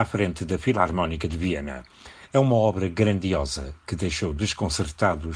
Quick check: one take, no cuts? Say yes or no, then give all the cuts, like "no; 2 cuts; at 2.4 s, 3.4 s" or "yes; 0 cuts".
no; 1 cut; at 2.3 s